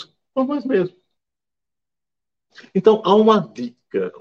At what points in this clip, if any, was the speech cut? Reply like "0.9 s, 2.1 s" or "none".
none